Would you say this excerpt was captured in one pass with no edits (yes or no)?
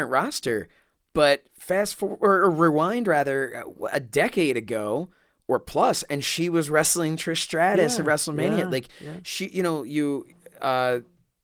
yes